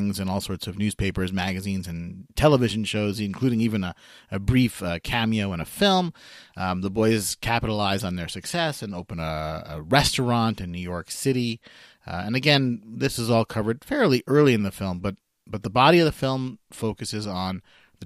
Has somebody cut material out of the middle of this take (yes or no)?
no